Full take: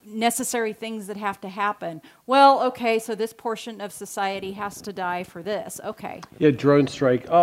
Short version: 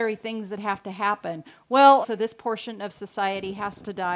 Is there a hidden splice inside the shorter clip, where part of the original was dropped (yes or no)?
yes